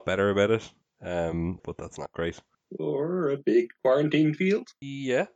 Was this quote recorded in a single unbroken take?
no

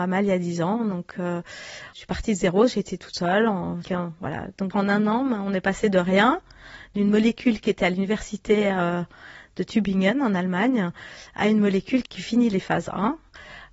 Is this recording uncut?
no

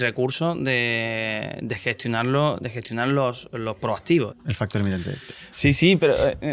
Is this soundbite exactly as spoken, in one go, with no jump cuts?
no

